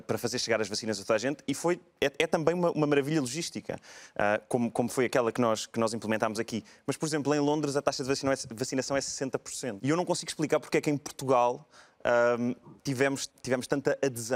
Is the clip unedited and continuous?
no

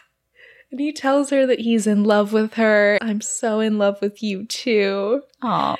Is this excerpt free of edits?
no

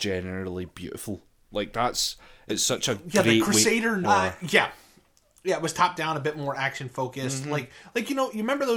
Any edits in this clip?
yes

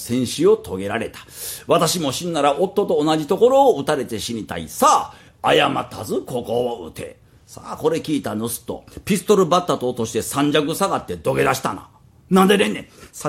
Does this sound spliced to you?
no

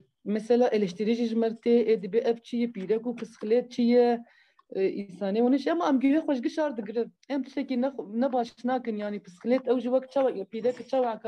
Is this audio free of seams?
no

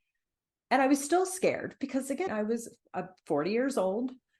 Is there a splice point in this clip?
yes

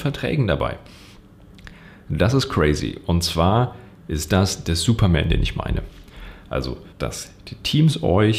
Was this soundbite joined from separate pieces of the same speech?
yes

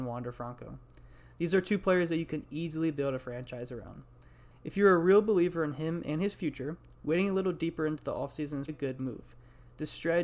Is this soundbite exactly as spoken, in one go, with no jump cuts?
no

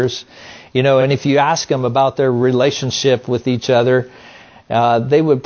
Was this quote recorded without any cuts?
yes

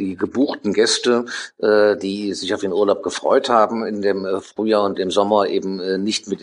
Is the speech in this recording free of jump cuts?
yes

